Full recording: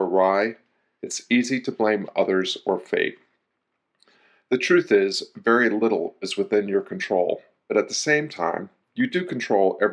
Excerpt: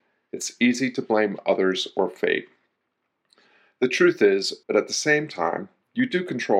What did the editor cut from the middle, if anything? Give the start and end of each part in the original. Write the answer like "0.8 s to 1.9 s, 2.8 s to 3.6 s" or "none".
5.3 s to 7.6 s